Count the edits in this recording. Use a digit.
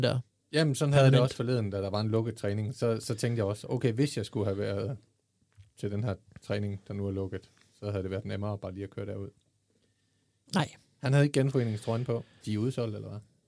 2